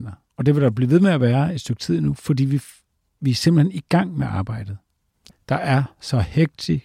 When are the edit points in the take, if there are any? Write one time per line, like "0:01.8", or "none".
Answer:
0:05.3